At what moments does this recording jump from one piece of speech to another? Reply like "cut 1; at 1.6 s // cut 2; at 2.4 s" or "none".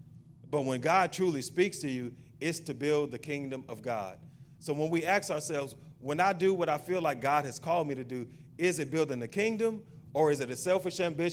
none